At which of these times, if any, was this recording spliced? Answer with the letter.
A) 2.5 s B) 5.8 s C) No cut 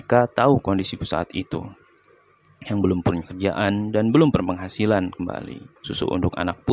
B